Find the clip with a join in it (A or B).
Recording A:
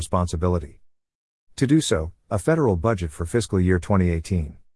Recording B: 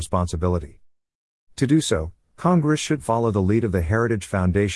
A